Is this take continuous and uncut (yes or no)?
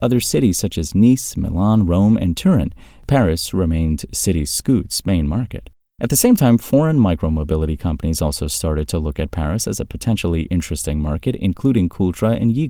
yes